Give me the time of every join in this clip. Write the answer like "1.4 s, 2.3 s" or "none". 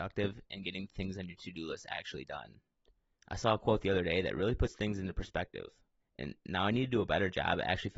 3.2 s, 6.0 s